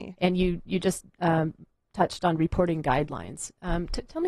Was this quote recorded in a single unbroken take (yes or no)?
yes